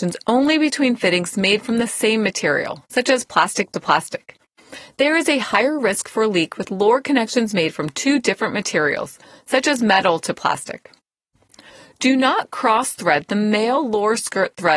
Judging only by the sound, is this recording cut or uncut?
uncut